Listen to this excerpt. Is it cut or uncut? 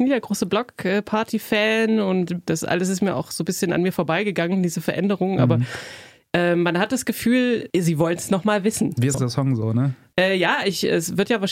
cut